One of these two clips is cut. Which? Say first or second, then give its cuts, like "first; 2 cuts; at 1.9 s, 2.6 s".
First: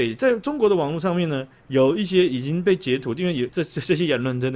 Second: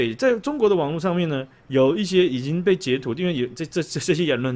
first; 1 cut; at 3.5 s